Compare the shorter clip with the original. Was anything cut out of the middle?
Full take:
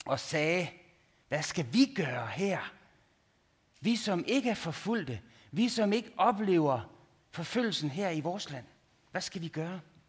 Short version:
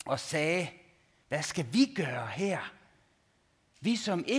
no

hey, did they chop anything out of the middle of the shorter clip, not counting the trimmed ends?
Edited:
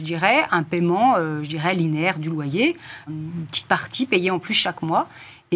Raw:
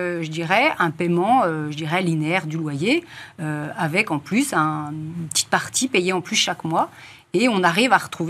yes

